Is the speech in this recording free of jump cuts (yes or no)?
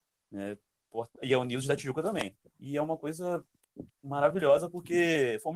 no